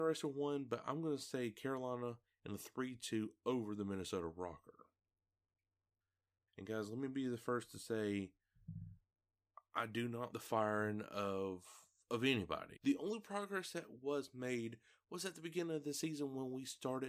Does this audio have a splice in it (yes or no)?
yes